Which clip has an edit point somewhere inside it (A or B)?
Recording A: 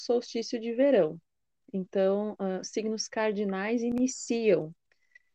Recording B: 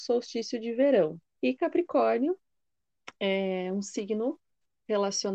B